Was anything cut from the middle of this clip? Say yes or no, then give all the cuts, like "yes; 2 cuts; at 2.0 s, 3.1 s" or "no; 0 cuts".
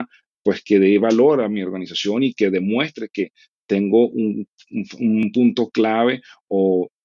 no; 0 cuts